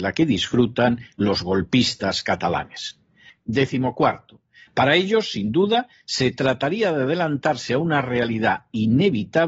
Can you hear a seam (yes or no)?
yes